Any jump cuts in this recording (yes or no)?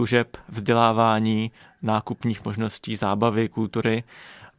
no